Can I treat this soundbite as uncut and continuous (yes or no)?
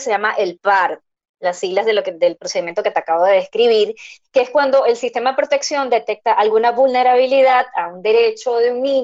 no